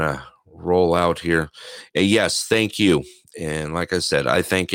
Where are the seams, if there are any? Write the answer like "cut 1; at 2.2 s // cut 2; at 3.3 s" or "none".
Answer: none